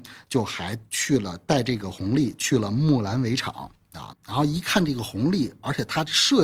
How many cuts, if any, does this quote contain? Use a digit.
1